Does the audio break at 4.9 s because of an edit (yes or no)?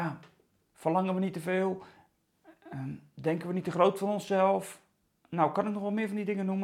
no